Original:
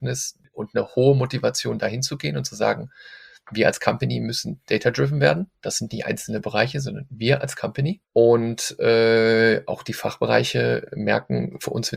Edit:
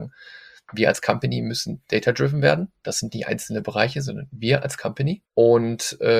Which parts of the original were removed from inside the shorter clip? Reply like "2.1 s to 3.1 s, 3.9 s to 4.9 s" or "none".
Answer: none